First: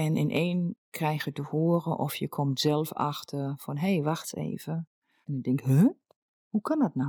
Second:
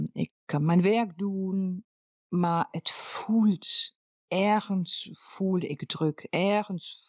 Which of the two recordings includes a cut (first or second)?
first